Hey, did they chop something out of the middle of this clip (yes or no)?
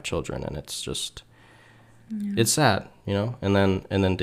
no